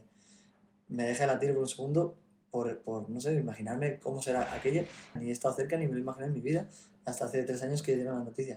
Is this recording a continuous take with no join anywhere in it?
no; 1 cut; at 5.2 s

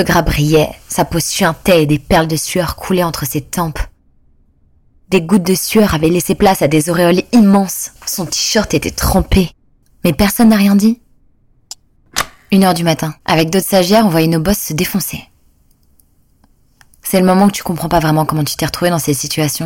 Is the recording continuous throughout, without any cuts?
no; 3 cuts; at 8.0 s, 9.8 s, 13.2 s

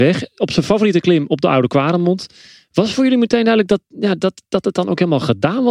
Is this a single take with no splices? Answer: yes; 0 cuts

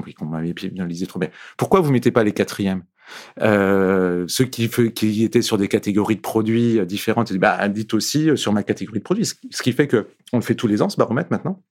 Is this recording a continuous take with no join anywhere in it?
yes; 0 cuts

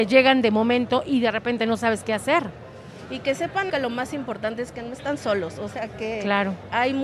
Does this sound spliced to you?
yes; 1 cut; at 3.7 s

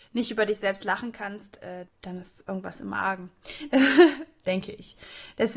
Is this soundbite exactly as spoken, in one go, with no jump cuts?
no; 1 cut; at 1.9 s

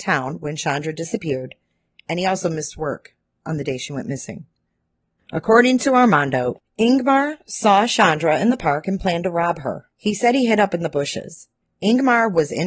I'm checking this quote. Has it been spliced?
yes; 3 cuts; at 5.2 s, 9.9 s, 11.6 s

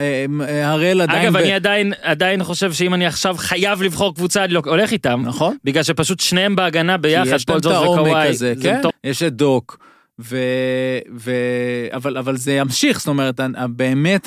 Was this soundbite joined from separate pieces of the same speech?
yes; 1 cut; at 8.9 s

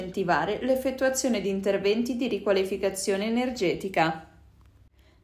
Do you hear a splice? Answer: no; 0 cuts

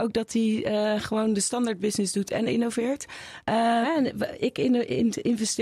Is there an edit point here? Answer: yes; 1 cut; at 3.8 s

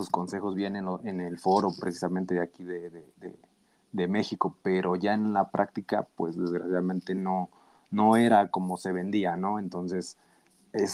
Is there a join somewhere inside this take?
no; 0 cuts

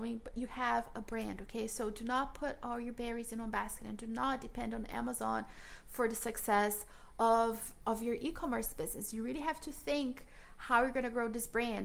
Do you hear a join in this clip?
no; 0 cuts

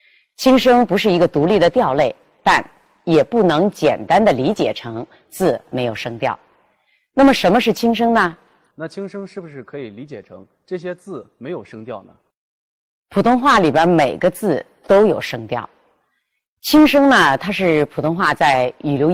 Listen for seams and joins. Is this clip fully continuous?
no; 1 cut; at 8.7 s

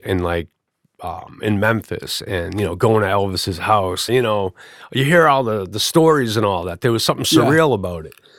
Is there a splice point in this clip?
yes; 1 cut; at 4.1 s

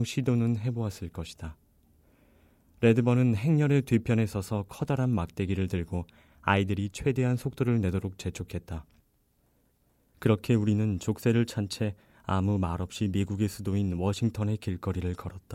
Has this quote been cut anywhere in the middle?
no; 0 cuts

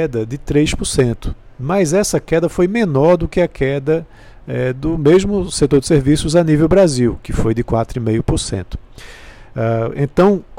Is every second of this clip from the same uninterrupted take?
yes; 0 cuts

